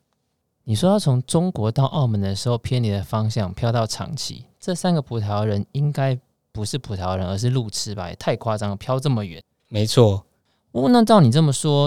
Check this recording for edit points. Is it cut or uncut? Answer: uncut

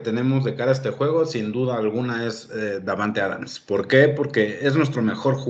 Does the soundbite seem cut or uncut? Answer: uncut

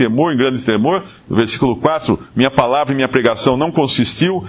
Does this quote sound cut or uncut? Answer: uncut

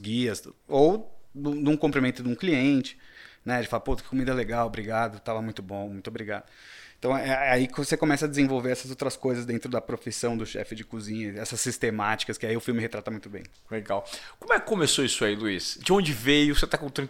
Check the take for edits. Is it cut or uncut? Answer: uncut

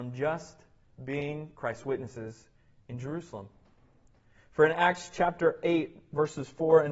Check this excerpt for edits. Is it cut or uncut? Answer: uncut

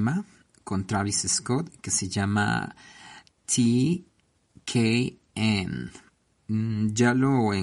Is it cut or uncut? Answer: uncut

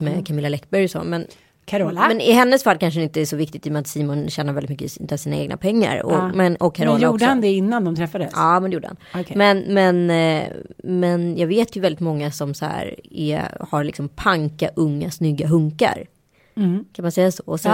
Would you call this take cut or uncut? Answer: uncut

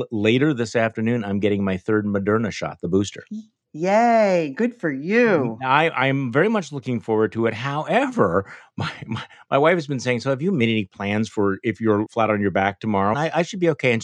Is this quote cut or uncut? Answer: cut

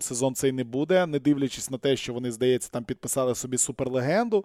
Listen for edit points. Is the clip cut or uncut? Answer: uncut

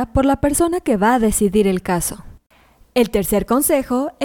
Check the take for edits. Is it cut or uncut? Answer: uncut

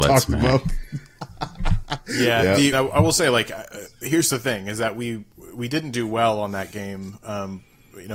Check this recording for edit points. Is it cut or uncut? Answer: cut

